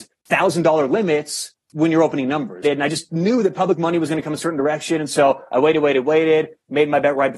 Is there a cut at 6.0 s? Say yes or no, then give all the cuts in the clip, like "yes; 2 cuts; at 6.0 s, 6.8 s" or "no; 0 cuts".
no; 1 cut; at 2.6 s